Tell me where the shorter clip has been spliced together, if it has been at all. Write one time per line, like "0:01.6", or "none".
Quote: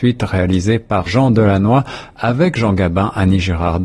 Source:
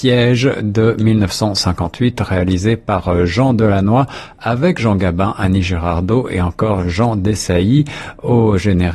0:01.1

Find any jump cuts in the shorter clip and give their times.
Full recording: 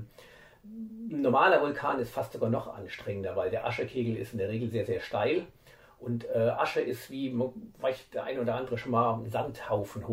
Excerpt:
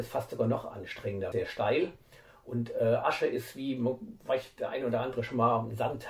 0:01.3

